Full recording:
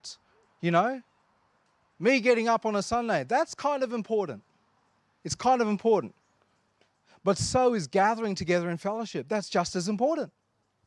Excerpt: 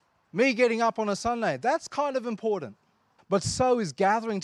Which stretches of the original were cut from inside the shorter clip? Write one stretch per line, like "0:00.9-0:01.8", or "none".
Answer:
0:04.9-0:07.1